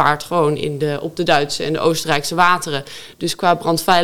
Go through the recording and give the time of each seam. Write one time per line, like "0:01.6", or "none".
none